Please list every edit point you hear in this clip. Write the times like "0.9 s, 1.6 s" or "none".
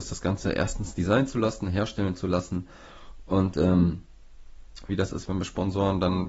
4.9 s